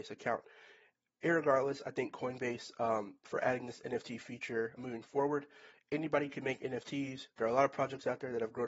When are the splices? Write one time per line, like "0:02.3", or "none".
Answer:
0:03.2
0:04.8